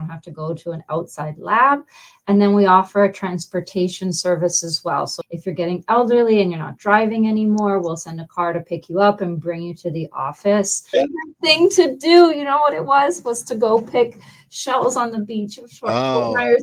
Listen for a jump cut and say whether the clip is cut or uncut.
cut